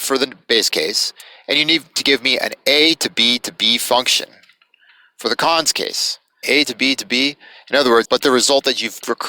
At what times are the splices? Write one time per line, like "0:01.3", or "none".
0:06.4
0:08.0